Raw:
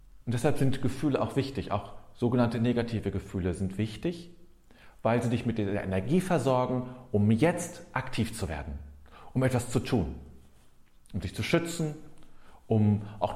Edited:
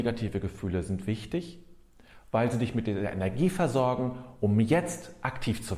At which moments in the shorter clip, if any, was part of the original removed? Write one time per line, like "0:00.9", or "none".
none